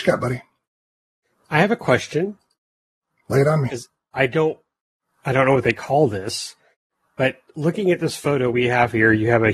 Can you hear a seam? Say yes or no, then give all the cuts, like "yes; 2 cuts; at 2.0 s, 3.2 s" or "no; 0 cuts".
no; 0 cuts